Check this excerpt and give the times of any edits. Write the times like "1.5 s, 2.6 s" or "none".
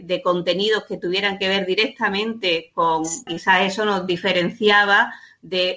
3.3 s